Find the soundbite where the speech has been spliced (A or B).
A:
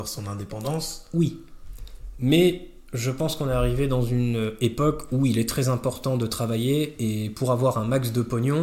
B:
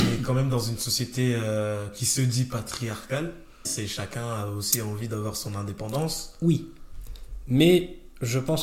B